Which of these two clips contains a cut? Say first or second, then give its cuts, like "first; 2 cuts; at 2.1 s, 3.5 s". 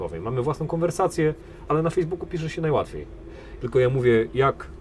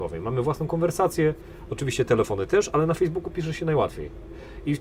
first; 2 cuts; at 1.7 s, 3.6 s